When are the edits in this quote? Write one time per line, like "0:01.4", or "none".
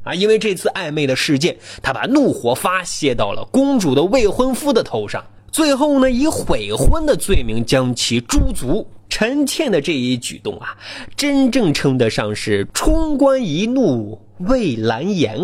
0:09.0

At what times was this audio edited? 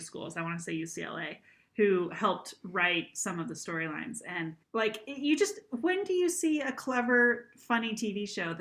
0:04.6

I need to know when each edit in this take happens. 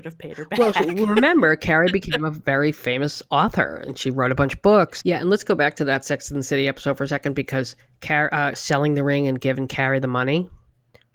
0:05.0
0:08.5

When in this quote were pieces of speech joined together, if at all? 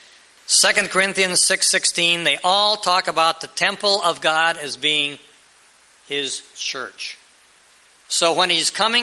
0:08.0

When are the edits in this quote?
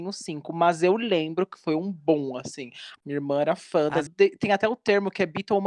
0:03.0
0:04.1

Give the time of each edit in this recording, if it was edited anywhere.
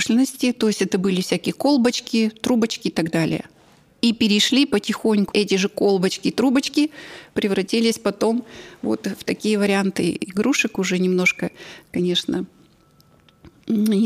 0:05.3

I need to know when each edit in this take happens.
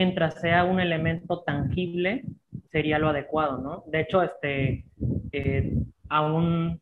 0:02.6

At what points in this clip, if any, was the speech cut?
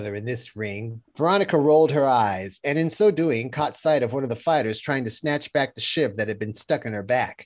0:01.0

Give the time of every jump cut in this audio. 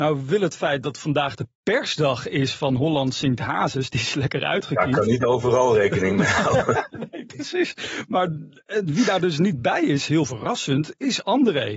none

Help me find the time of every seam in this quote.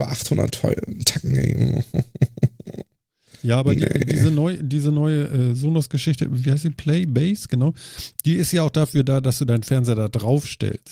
none

